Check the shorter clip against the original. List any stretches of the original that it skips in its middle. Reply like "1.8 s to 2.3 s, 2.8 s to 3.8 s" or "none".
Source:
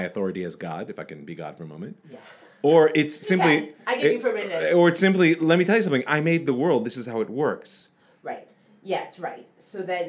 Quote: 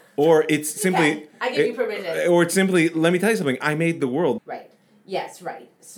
6.8 s to 8.2 s